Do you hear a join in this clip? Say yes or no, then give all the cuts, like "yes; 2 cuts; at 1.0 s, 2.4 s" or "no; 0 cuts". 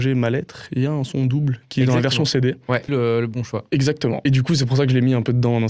yes; 1 cut; at 2.9 s